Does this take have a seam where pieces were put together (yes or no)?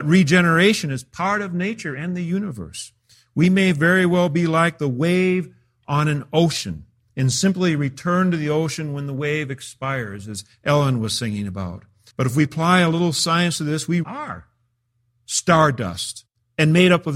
yes